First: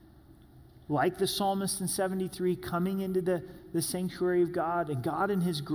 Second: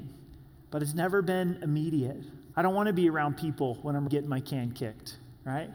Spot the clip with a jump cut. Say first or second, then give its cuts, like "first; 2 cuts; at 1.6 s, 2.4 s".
second; 2 cuts; at 2.5 s, 4.1 s